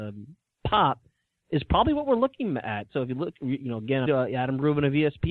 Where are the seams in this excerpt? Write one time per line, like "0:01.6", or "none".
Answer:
0:02.9
0:04.1